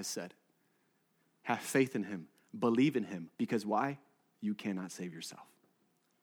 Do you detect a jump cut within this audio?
yes; 1 cut; at 3.3 s

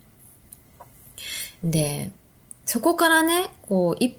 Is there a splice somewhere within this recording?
no; 0 cuts

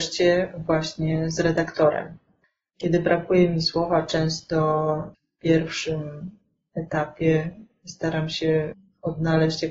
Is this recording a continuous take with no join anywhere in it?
yes; 0 cuts

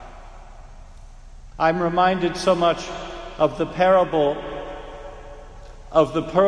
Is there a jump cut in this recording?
yes; 1 cut; at 1.5 s

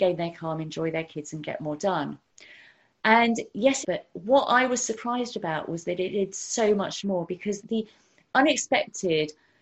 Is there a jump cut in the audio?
yes; 2 cuts; at 3.8 s, 7.6 s

